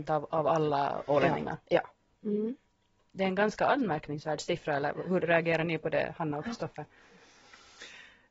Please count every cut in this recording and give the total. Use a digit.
1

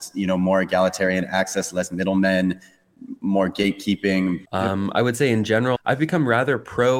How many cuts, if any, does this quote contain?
2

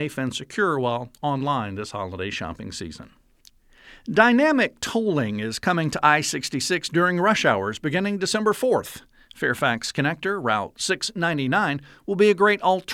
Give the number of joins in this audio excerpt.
0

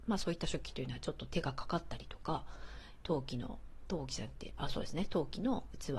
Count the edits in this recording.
1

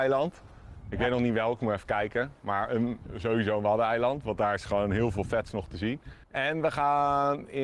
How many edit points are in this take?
1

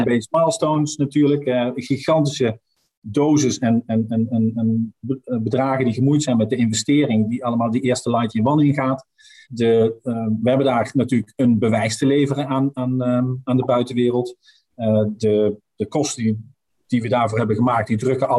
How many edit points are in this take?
1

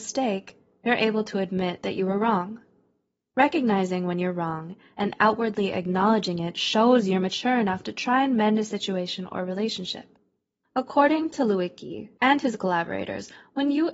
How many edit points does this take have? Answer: 2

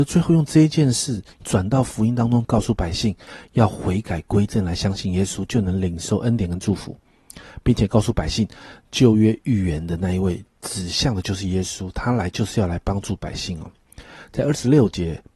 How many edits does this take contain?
1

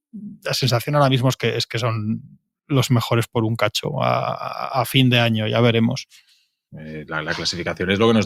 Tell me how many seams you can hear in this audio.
1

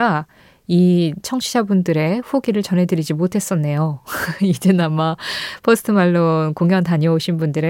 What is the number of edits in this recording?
0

